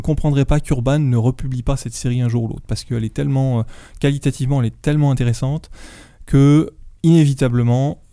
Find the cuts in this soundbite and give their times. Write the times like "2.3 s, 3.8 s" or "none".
7.0 s